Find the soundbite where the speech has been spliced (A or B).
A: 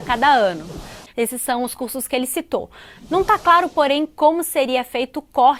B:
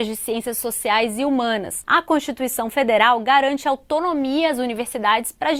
A